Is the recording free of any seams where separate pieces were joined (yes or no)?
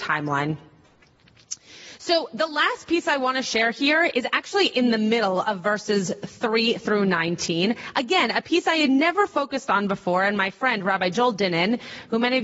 yes